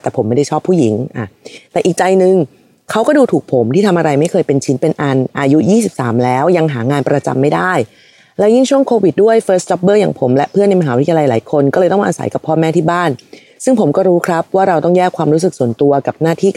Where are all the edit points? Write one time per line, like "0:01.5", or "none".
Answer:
0:09.1